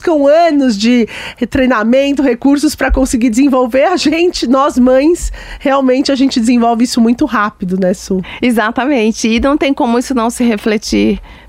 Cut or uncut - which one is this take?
uncut